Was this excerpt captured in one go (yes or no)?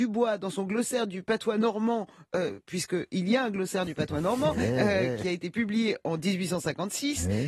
yes